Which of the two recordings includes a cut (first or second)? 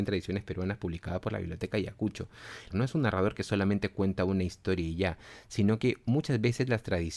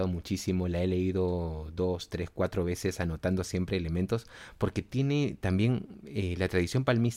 first